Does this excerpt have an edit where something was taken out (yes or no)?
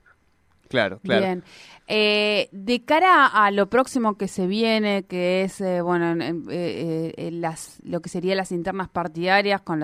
no